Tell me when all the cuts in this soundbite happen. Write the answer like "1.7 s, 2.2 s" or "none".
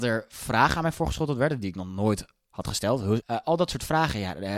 3.2 s